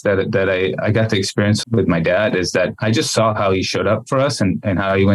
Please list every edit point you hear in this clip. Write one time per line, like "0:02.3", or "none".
0:01.6

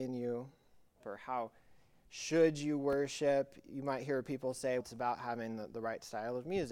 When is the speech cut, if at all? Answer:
0:01.0
0:04.8

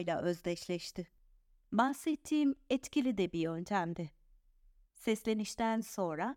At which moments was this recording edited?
none

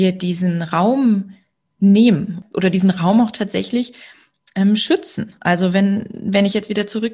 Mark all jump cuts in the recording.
none

